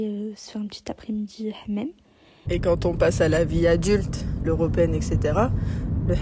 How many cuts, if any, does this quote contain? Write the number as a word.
two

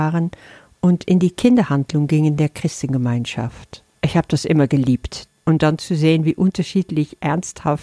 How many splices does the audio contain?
two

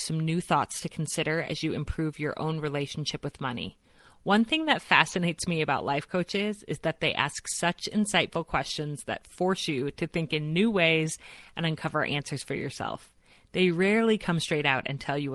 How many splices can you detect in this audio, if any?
zero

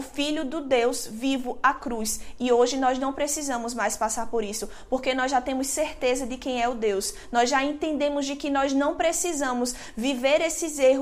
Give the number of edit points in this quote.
zero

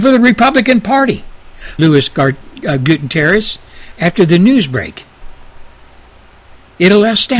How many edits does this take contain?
one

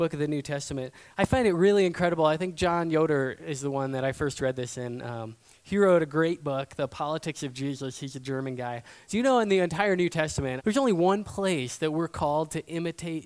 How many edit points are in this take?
two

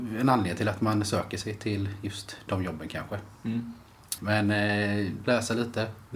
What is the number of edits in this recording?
two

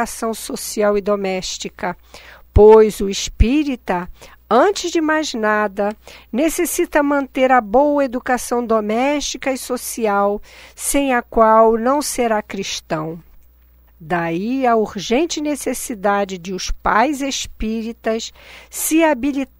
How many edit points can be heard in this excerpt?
one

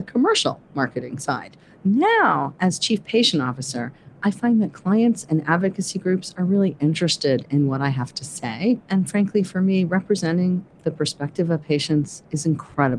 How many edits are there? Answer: zero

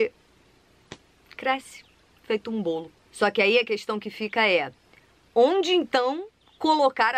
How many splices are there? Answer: zero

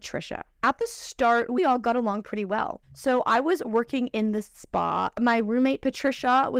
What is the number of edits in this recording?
two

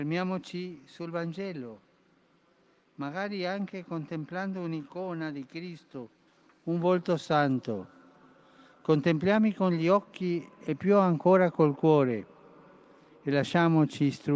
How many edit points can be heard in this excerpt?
zero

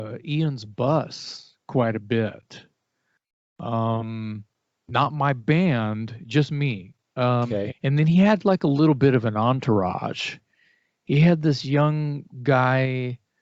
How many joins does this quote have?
one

